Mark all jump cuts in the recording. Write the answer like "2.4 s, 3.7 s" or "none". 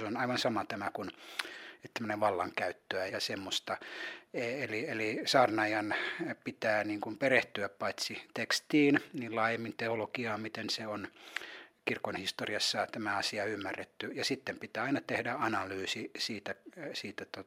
3.1 s